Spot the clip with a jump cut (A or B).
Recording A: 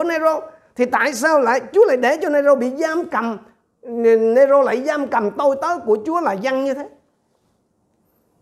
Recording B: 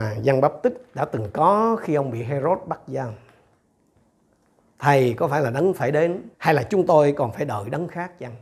B